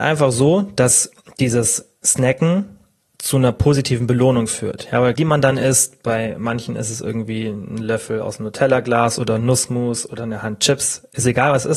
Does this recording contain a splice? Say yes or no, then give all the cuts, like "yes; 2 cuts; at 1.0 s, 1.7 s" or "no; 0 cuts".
yes; 2 cuts; at 2.0 s, 5.1 s